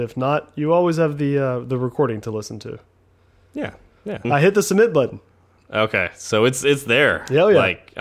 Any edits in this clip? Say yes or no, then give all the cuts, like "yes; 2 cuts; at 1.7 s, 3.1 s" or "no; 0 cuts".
yes; 1 cut; at 4.2 s